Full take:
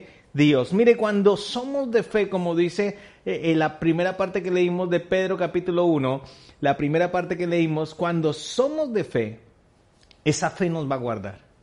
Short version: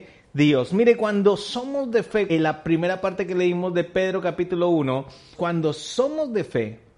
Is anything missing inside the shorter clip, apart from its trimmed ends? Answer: yes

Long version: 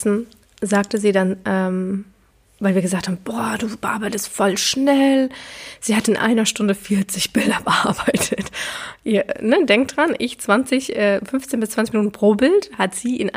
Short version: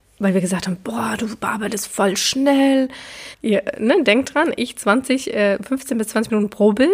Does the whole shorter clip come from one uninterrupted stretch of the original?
no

